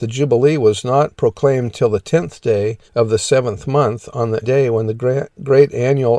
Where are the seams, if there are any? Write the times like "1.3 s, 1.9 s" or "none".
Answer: 2.9 s, 4.4 s